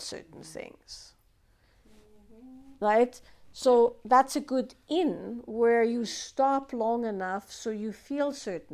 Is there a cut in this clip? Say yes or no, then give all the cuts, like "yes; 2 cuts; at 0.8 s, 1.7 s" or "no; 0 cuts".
no; 0 cuts